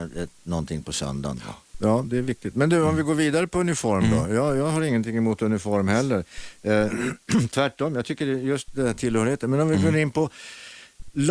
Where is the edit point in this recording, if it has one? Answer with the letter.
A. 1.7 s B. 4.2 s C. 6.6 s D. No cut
A